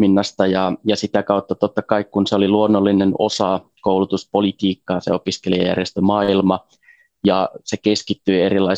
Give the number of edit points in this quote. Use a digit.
0